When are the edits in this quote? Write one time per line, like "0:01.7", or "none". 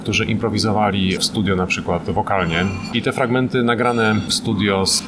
0:02.9